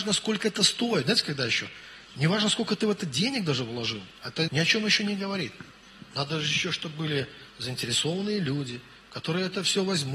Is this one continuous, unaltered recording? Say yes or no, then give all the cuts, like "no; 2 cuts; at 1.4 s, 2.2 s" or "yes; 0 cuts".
no; 1 cut; at 4.5 s